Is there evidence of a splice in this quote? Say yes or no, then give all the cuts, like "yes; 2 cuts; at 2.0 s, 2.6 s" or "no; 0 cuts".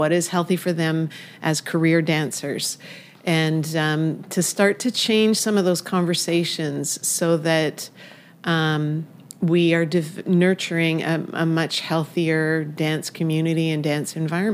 no; 0 cuts